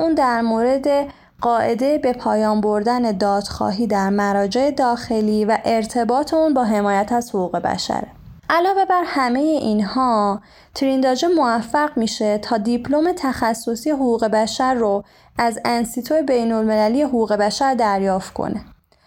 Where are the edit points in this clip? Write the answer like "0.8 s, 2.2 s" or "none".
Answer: 8.4 s